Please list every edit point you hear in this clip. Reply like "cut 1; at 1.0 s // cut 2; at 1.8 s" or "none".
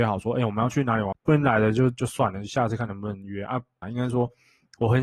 cut 1; at 1.1 s // cut 2; at 3.8 s

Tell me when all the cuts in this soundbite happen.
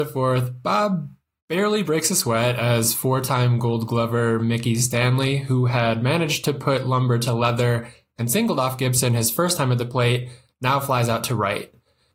none

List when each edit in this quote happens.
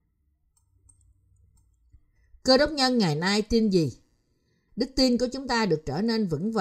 cut 1; at 4.7 s

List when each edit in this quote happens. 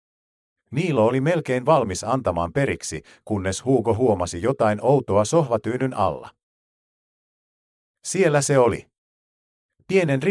none

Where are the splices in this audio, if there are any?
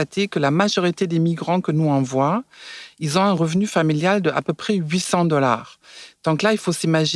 none

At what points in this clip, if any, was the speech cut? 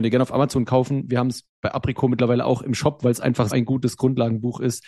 cut 1; at 3.5 s

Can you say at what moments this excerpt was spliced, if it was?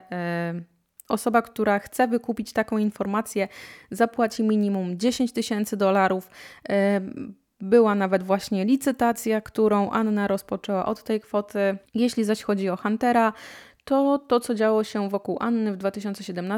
cut 1; at 11.8 s

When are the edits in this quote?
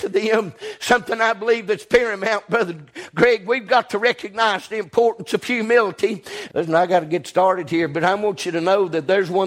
cut 1; at 6.5 s

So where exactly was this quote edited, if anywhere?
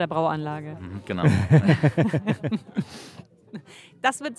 none

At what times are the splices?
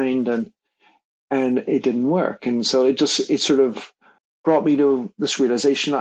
none

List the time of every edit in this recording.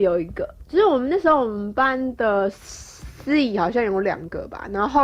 none

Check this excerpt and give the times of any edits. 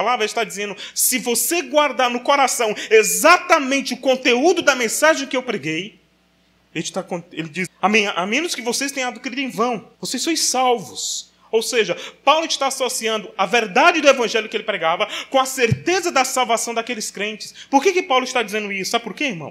cut 1; at 7.7 s // cut 2; at 9.9 s

